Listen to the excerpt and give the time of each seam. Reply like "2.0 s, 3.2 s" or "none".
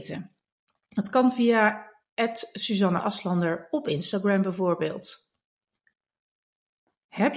none